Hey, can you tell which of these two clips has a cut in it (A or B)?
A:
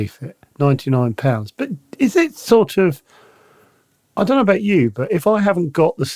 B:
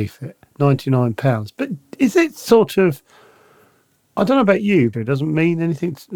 B